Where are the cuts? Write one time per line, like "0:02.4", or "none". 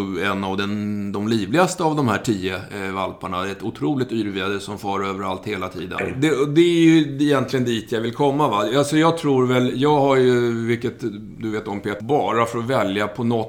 0:06.0
0:12.0